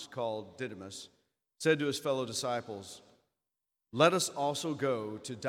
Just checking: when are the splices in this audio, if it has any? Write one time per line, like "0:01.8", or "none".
none